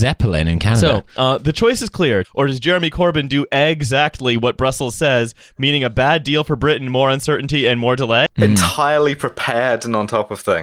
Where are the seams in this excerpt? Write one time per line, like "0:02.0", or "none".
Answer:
0:02.2
0:08.3